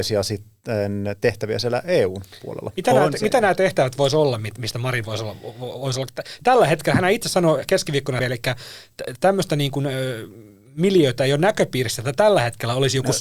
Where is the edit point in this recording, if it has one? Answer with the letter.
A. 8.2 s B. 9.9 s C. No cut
A